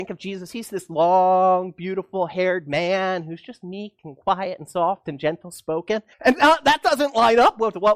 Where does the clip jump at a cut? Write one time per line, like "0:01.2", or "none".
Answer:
0:06.1

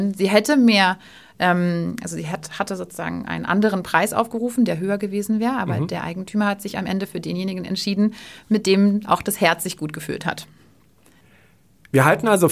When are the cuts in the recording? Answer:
none

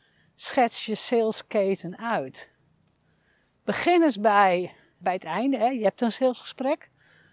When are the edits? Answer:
0:05.0

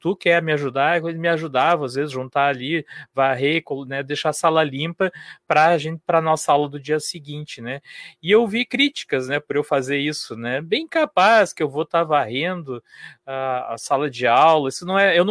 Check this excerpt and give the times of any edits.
none

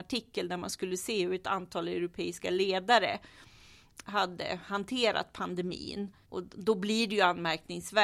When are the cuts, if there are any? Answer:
0:06.2

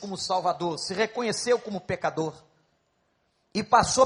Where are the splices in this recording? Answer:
none

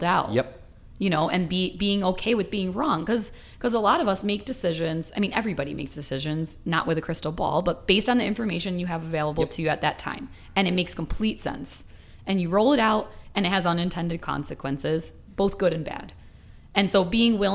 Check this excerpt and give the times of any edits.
none

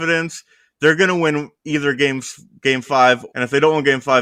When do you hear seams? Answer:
0:03.3

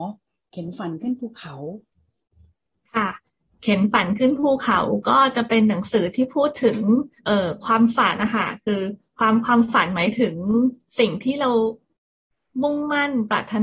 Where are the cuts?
0:07.2
0:08.2

